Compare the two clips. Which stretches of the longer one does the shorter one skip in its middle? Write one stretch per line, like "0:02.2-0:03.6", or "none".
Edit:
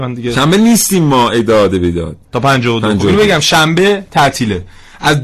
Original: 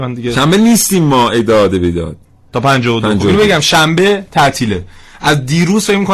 0:02.3-0:02.5